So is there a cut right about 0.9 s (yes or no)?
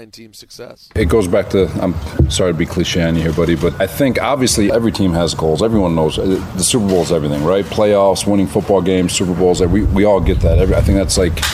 no